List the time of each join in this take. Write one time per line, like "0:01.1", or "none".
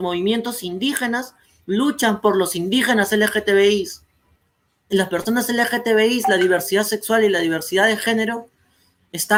none